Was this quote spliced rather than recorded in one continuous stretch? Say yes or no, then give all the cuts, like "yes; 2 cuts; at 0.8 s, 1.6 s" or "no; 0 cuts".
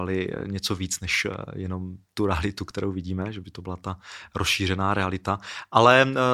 no; 0 cuts